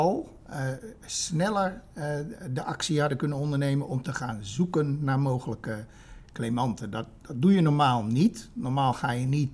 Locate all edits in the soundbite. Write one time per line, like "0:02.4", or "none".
none

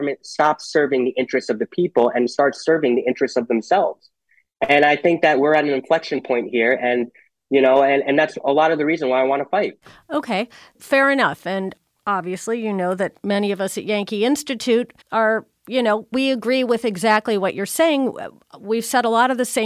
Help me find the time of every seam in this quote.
0:15.0
0:16.1

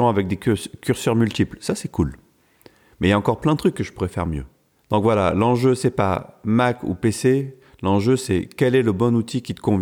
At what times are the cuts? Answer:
none

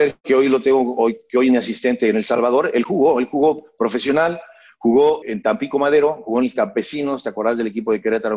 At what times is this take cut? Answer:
0:05.2

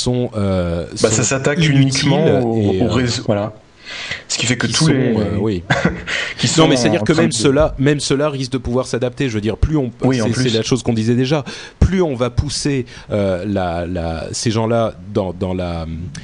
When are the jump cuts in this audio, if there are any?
0:03.2

